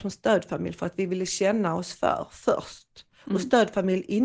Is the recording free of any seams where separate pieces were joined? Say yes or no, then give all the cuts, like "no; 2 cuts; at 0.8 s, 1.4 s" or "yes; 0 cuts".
yes; 0 cuts